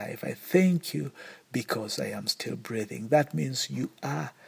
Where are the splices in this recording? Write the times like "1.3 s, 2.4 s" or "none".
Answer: none